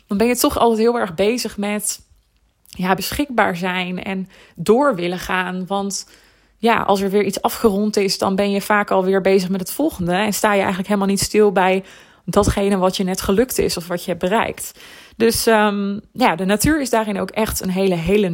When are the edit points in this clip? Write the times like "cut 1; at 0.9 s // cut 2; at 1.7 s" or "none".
cut 1; at 3.0 s